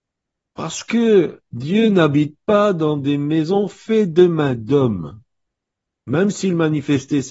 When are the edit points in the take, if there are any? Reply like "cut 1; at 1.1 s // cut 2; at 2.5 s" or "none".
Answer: cut 1; at 6.0 s

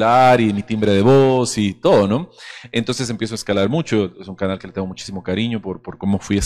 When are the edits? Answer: none

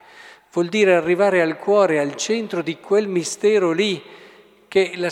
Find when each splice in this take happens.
none

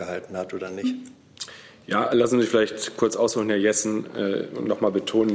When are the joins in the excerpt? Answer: none

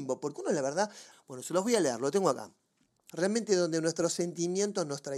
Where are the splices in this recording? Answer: cut 1; at 1.1 s // cut 2; at 3.1 s

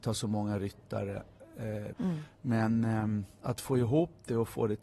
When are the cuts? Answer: cut 1; at 1.9 s

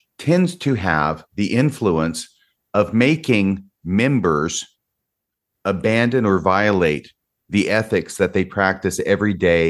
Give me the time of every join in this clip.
none

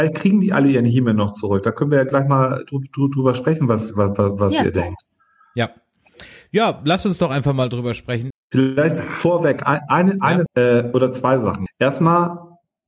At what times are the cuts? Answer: cut 1; at 8.3 s // cut 2; at 10.5 s // cut 3; at 11.7 s

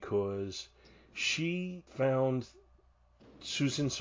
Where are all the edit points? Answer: cut 1; at 1.9 s

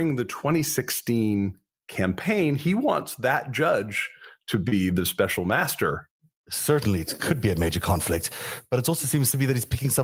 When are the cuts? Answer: none

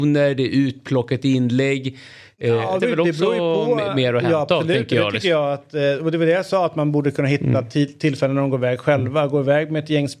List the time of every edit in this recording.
cut 1; at 2.8 s

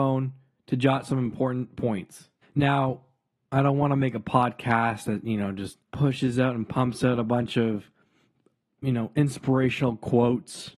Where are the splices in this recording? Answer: cut 1; at 2.4 s // cut 2; at 5.8 s

